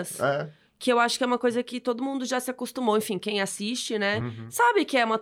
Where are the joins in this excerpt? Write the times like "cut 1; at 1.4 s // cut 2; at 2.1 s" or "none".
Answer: none